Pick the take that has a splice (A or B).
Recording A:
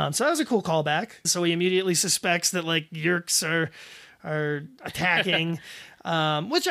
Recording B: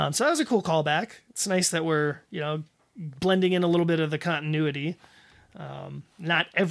A